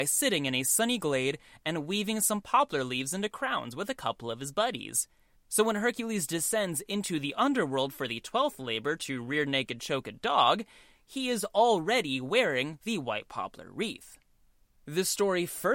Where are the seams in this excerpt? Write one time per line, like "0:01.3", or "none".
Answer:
0:05.4